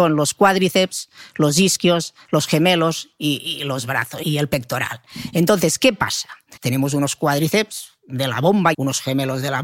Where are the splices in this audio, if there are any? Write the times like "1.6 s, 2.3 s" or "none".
4.2 s, 6.6 s, 8.7 s